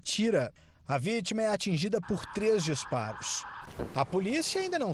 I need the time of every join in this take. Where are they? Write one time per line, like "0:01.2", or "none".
0:03.9